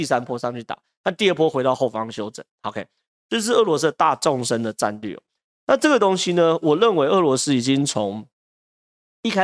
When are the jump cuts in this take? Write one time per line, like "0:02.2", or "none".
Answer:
none